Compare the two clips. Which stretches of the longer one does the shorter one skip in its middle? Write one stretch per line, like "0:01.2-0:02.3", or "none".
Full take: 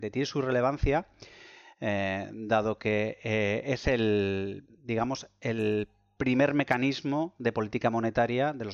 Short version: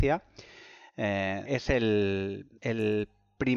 0:02.3-0:03.6
0:04.7-0:05.4